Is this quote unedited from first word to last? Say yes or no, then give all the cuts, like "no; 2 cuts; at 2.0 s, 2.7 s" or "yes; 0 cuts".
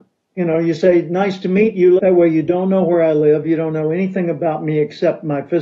no; 1 cut; at 2.0 s